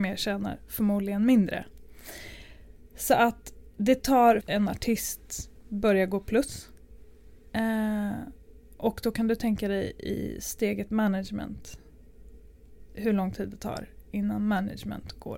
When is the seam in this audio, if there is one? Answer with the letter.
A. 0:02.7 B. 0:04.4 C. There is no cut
B